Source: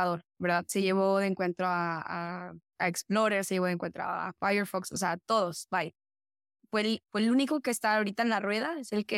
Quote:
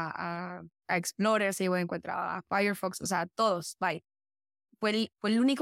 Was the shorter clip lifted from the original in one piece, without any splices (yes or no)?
yes